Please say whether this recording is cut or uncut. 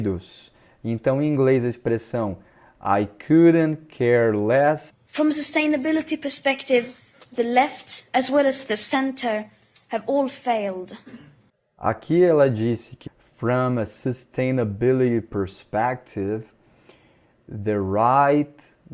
cut